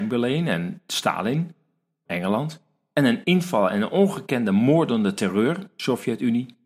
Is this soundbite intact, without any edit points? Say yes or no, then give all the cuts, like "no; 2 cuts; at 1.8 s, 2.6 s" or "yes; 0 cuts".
no; 1 cut; at 2.0 s